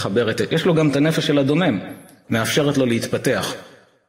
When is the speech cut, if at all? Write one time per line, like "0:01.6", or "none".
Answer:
0:02.2